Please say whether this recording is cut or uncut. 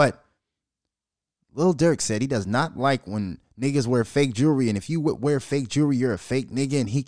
uncut